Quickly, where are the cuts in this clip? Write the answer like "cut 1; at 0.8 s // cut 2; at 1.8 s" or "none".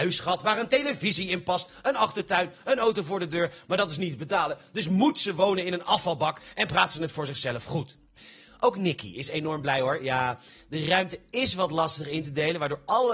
none

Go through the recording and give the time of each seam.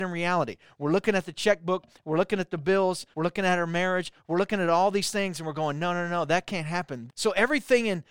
cut 1; at 3.1 s // cut 2; at 7.1 s

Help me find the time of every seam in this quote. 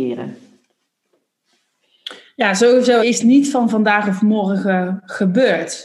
cut 1; at 3.0 s

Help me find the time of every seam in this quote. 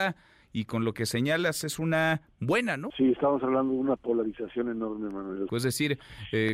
cut 1; at 2.9 s // cut 2; at 5.5 s

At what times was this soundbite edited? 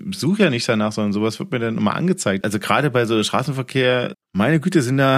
cut 1; at 2.4 s // cut 2; at 4.1 s

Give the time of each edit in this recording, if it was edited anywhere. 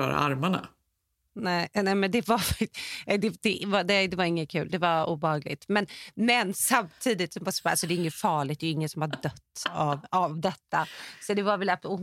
none

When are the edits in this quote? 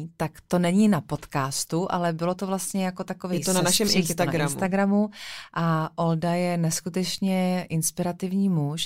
none

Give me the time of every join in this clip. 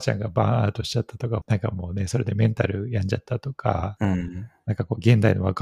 cut 1; at 1.4 s

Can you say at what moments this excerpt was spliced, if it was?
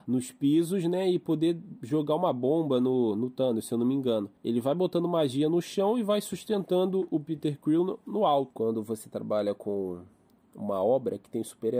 cut 1; at 8.5 s

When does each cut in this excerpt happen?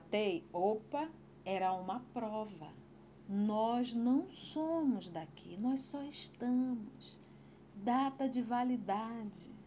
cut 1; at 3.2 s

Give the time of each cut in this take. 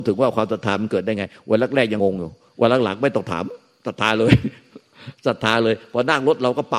cut 1; at 2.0 s

